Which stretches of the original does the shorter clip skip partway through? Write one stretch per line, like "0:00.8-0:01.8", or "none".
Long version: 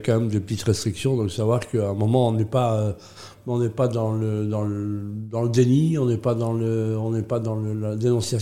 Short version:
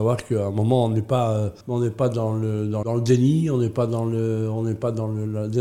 0:03.0-0:03.4
0:04.6-0:05.3